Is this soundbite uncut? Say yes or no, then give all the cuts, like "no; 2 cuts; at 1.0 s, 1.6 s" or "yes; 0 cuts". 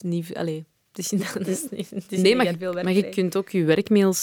yes; 0 cuts